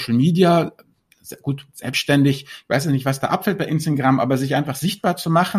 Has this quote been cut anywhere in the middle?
no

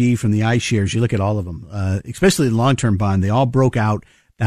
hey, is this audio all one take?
yes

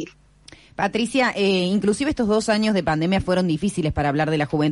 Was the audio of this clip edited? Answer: no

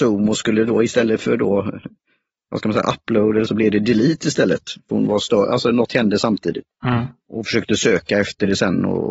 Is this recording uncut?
no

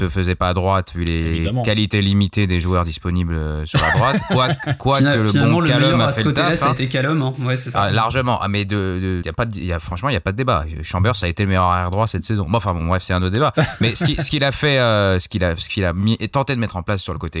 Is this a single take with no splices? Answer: no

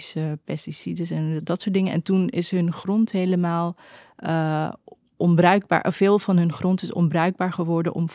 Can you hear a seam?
no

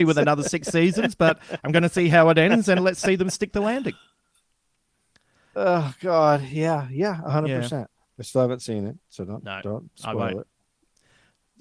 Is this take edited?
no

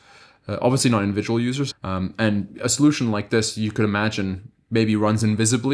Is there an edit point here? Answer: yes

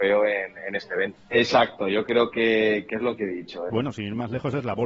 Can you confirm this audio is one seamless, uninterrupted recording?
no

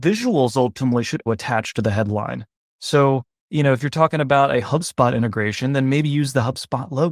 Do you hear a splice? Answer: yes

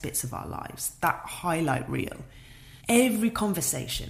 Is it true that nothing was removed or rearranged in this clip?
no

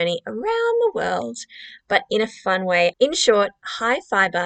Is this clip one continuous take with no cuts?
no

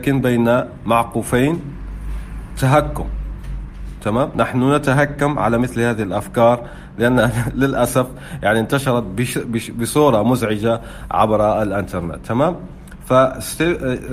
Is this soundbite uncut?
yes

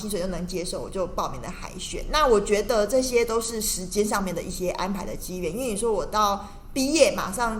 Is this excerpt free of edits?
yes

